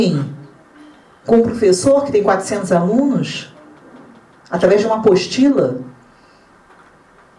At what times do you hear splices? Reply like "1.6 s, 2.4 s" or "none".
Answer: none